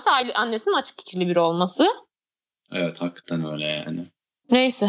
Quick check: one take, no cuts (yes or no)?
yes